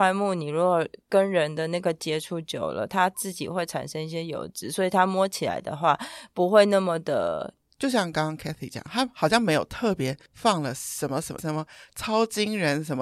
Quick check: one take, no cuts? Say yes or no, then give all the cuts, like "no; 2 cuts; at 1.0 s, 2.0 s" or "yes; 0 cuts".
no; 2 cuts; at 7.7 s, 11.4 s